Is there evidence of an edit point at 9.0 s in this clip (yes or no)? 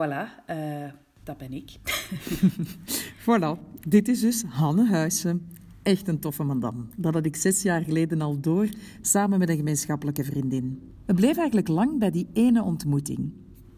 yes